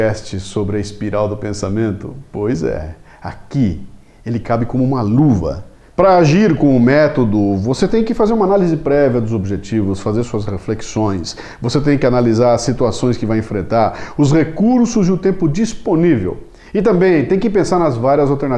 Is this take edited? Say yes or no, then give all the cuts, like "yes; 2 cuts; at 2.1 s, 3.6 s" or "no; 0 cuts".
no; 0 cuts